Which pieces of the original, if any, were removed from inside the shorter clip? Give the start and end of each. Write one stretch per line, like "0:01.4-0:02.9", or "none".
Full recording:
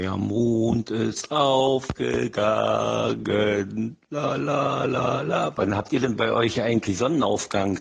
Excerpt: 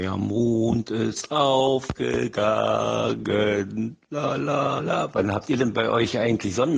0:04.8-0:05.2